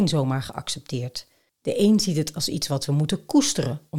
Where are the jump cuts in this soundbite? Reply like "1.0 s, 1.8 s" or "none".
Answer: none